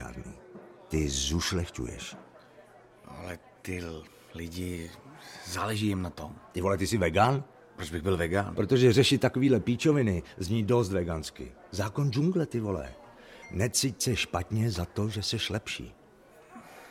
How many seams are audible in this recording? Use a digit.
0